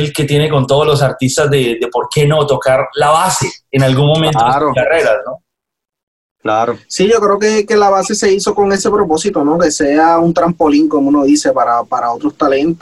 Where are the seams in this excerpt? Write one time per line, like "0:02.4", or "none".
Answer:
none